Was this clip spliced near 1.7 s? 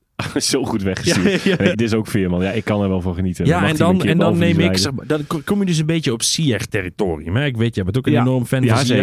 yes; 1 cut; at 1.7 s

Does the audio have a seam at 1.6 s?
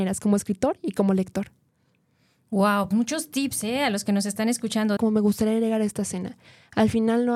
no; 2 cuts; at 2.9 s, 5.0 s

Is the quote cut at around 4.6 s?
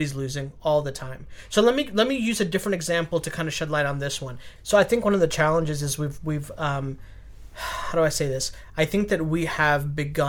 yes; 1 cut; at 4.6 s

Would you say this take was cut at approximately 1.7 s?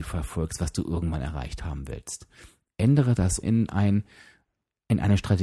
no; 1 cut; at 3.4 s

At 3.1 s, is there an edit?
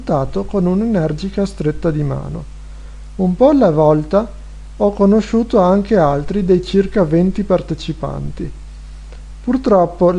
no; 0 cuts

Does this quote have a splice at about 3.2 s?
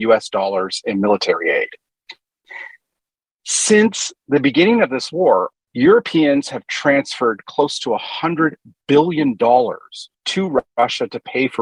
no; 2 cuts; at 5.5 s, 10.1 s

